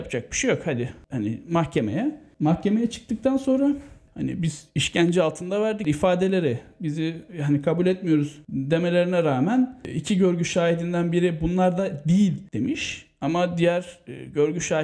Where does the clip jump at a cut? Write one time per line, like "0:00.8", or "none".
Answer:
none